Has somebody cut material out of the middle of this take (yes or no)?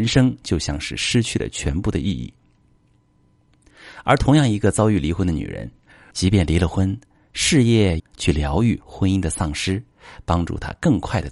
yes